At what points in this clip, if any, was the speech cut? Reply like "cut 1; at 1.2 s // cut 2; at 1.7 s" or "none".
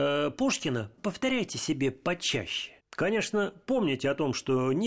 cut 1; at 1.0 s // cut 2; at 2.8 s